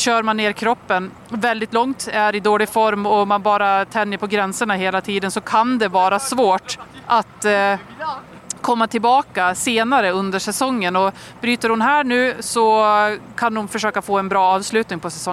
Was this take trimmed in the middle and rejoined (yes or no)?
no